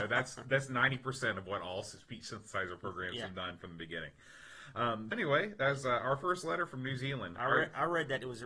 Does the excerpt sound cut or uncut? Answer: cut